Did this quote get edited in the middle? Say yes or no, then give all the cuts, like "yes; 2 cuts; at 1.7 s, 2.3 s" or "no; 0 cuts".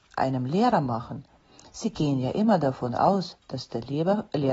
no; 0 cuts